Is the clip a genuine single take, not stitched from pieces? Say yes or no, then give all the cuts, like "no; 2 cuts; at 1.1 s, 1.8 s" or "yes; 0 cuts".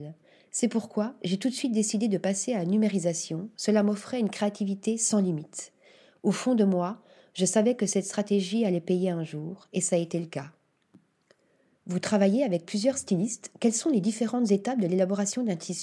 yes; 0 cuts